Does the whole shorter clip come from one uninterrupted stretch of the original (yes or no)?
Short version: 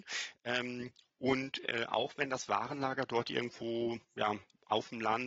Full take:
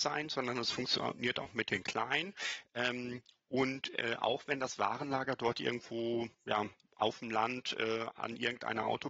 yes